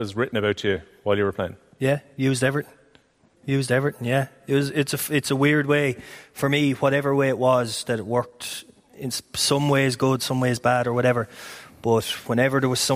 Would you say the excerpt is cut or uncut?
cut